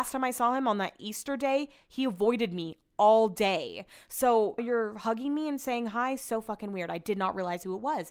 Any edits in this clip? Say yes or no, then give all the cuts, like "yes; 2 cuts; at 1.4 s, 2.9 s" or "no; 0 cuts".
yes; 1 cut; at 4.6 s